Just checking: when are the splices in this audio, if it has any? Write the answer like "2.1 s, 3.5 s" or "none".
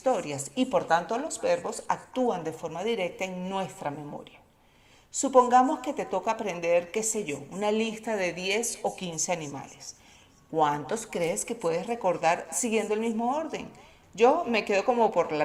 none